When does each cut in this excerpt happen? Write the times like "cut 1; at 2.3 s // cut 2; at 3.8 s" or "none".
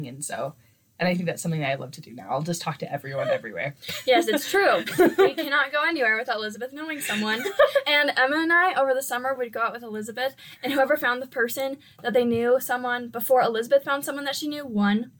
none

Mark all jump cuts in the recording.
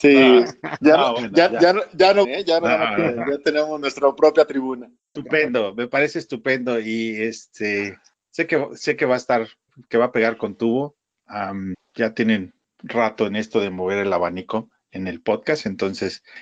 cut 1; at 2.2 s // cut 2; at 5.2 s

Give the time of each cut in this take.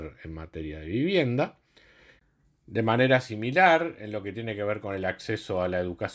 none

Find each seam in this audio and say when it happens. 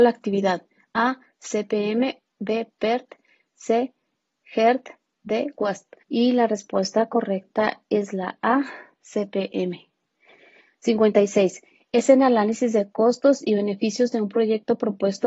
cut 1; at 6.0 s

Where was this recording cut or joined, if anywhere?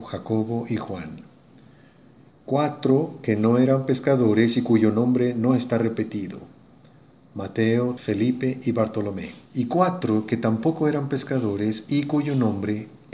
cut 1; at 8.0 s // cut 2; at 9.5 s

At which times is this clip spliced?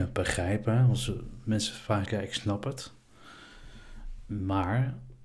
cut 1; at 2.0 s

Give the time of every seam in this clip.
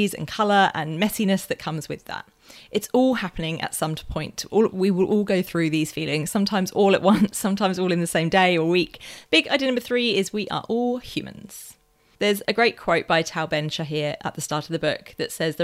cut 1; at 9.2 s

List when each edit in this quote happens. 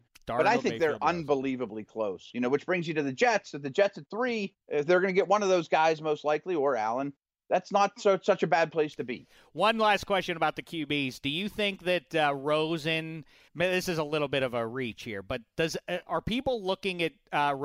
cut 1; at 4.6 s // cut 2; at 13.5 s

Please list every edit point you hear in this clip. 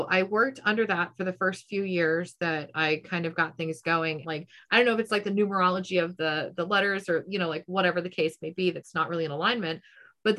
cut 1; at 4.2 s

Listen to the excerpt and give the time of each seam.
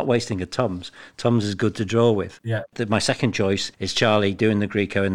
cut 1; at 2.4 s

